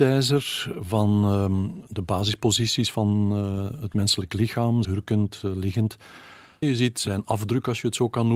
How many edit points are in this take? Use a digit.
2